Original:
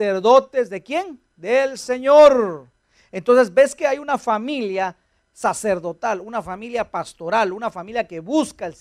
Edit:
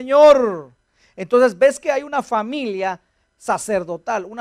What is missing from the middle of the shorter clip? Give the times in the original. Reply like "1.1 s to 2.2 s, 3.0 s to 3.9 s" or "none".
none